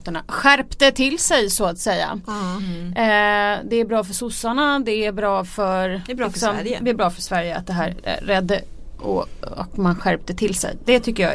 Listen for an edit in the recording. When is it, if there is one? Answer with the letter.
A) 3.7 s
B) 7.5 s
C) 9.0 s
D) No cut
C